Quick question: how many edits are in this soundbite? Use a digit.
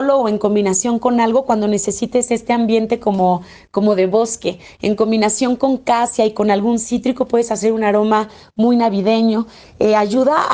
1